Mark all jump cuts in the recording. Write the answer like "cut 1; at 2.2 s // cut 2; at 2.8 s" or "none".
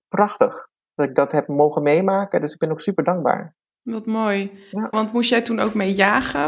cut 1; at 4.9 s